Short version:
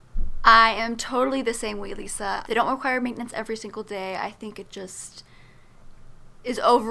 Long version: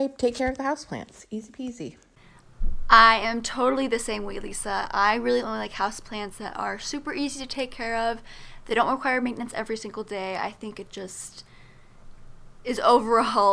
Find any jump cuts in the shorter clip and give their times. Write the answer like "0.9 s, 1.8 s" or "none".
2.4 s